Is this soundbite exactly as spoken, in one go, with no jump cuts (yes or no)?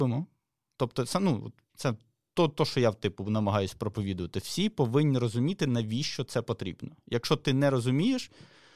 yes